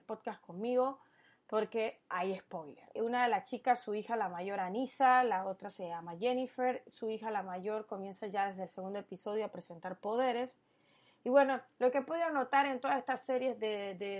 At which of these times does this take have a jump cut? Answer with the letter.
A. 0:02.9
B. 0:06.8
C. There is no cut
A